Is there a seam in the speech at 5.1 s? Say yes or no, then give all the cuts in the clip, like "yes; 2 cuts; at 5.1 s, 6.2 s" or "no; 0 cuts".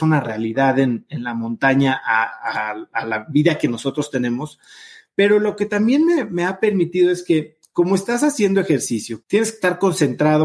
no; 1 cut; at 9.2 s